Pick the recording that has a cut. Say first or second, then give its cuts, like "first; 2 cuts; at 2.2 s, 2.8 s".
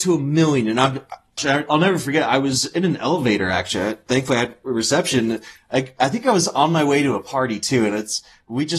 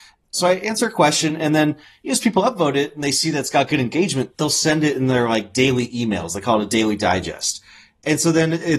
first; 1 cut; at 1.4 s